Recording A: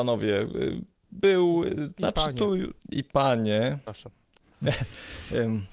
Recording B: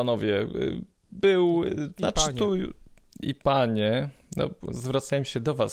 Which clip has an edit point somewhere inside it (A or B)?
A